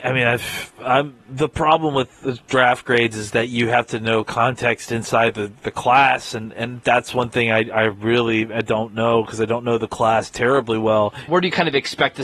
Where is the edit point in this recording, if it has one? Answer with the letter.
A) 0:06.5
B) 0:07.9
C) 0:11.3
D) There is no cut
C